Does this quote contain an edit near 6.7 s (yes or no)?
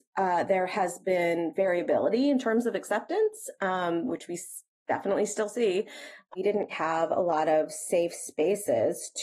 yes